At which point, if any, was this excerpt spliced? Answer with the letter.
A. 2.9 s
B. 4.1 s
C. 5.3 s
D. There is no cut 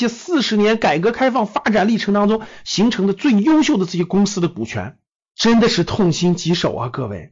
C